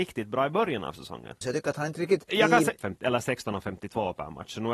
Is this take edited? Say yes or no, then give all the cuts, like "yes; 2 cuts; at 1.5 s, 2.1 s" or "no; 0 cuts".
yes; 2 cuts; at 1.4 s, 2.8 s